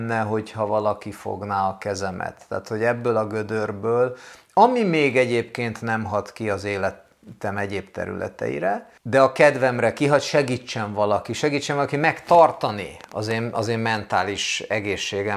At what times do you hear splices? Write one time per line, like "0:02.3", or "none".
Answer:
0:09.0